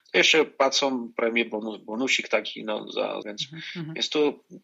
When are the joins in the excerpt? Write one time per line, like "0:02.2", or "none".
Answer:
0:03.2